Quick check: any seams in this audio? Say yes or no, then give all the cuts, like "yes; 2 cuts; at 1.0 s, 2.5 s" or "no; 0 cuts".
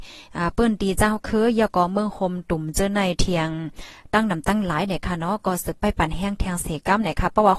no; 0 cuts